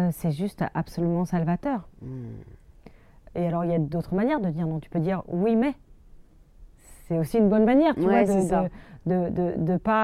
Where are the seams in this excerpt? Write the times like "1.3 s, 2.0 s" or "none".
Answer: none